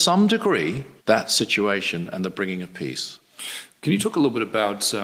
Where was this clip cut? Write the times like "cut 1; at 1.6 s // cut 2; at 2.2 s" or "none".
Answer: cut 1; at 1.0 s